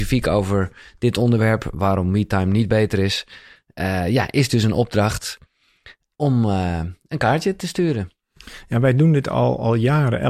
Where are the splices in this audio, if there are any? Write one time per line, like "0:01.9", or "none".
none